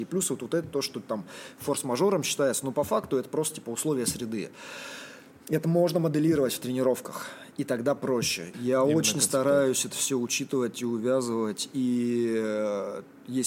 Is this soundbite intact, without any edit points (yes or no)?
no